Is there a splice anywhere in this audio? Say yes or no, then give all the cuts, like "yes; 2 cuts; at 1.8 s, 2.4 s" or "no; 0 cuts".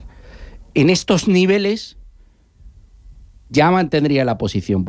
no; 0 cuts